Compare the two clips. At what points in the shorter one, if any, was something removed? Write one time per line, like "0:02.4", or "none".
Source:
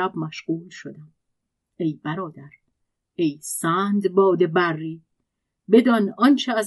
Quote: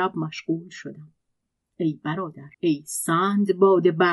0:02.5